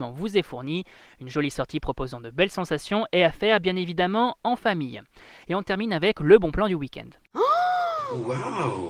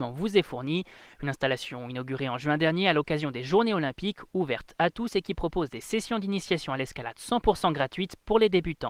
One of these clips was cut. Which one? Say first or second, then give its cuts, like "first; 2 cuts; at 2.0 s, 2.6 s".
second; 1 cut; at 1.2 s